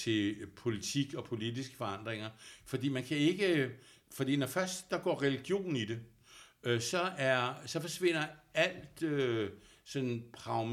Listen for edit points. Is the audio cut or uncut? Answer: uncut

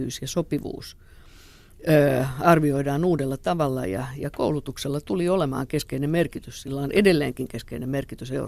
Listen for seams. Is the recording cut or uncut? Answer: uncut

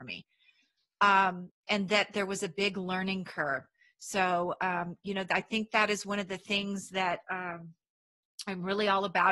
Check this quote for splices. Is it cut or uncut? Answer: uncut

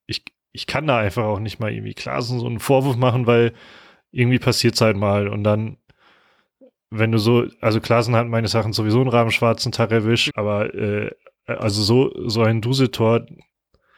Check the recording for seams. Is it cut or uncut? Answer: cut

